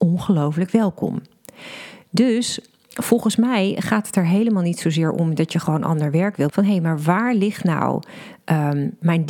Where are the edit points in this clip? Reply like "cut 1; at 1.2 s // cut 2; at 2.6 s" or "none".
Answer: cut 1; at 6.5 s